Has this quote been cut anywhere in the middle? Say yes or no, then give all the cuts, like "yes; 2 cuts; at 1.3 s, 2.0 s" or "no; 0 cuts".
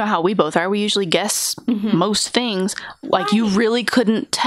yes; 1 cut; at 3.0 s